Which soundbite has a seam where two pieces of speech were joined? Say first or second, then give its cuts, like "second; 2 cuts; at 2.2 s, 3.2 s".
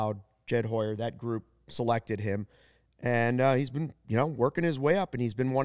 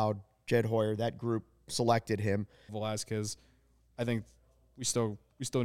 second; 1 cut; at 2.7 s